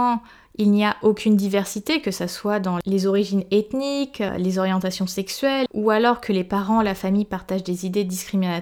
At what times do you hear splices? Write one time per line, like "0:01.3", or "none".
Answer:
0:05.7